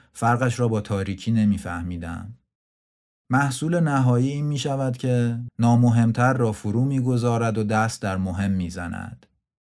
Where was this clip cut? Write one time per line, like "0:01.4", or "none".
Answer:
0:05.5